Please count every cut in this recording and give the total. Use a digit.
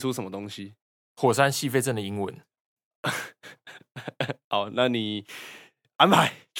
1